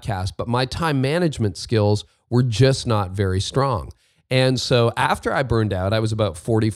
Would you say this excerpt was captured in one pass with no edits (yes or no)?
yes